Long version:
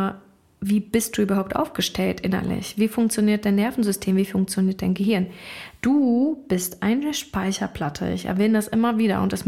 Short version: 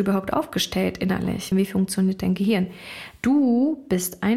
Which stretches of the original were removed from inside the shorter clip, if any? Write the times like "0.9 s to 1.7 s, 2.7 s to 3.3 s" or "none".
2.7 s to 4.1 s